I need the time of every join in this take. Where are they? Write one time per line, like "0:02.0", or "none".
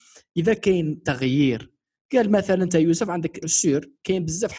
0:03.4